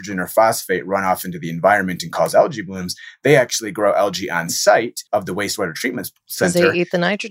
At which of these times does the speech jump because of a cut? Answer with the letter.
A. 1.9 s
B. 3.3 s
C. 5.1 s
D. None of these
C